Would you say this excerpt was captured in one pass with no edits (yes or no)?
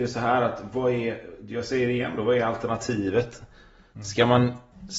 yes